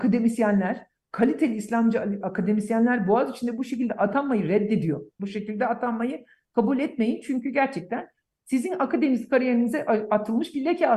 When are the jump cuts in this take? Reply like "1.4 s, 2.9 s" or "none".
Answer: 5.2 s